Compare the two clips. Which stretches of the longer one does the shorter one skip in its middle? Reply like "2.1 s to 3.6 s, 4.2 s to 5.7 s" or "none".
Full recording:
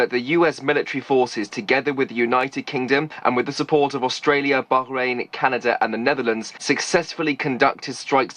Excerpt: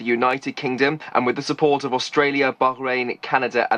none